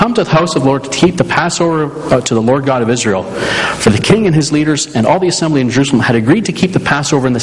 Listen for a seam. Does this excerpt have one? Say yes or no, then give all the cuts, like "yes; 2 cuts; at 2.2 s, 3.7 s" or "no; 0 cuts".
no; 0 cuts